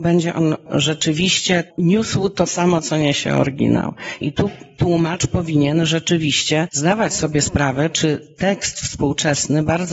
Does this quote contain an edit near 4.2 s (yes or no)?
yes